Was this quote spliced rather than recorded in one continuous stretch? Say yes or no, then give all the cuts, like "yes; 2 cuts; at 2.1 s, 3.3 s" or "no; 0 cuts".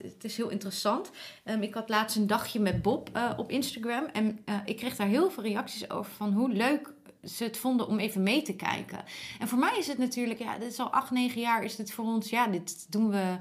yes; 1 cut; at 10.4 s